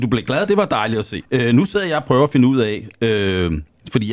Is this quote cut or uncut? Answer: cut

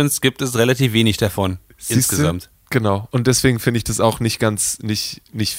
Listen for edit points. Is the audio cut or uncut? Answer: uncut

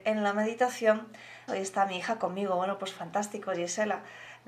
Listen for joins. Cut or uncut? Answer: cut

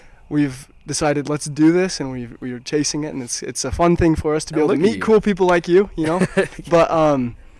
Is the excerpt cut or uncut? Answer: uncut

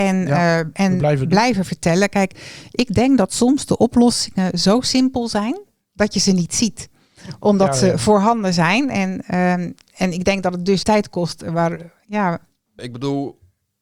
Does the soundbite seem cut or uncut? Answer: cut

